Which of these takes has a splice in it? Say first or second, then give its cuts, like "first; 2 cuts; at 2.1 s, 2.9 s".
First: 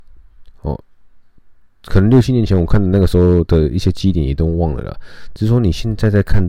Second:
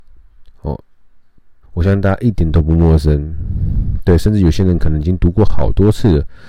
second; 1 cut; at 1.6 s